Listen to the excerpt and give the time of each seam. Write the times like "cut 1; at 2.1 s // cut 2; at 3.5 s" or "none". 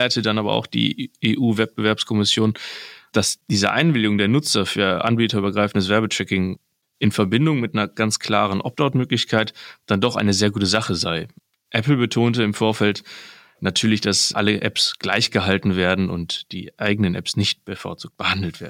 none